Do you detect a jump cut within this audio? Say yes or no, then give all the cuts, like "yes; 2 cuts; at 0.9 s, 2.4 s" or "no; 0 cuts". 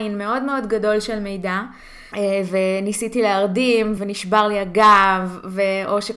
yes; 2 cuts; at 2.1 s, 4.0 s